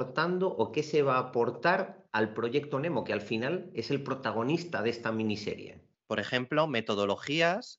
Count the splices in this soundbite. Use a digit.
1